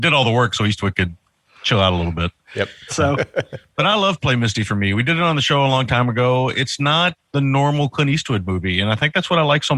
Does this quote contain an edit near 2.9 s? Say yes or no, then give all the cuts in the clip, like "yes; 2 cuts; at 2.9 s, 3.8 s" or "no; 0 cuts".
yes; 1 cut; at 2.9 s